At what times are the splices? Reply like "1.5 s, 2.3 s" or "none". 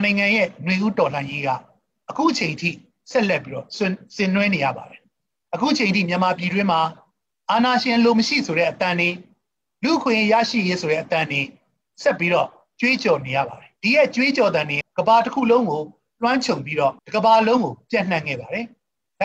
13.8 s, 14.8 s, 17.0 s

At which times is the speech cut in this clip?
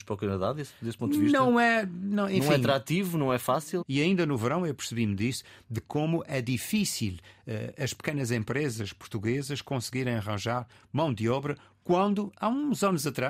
3.8 s

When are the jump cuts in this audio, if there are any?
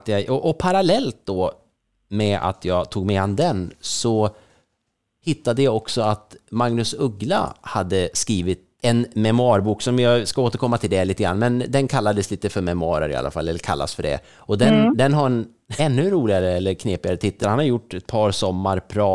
8.8 s, 15.8 s, 17.4 s

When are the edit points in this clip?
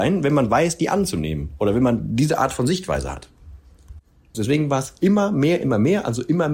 4.3 s, 5.6 s

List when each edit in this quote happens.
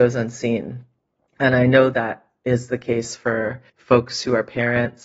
3.7 s

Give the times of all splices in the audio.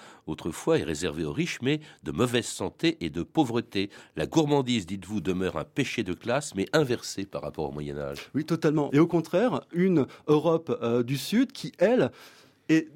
8.9 s

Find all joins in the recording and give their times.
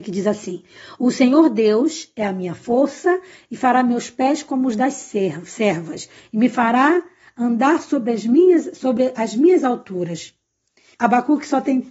10.9 s

